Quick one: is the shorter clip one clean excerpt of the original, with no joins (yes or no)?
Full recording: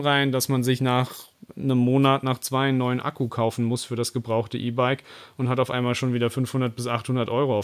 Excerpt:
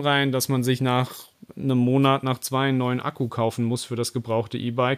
yes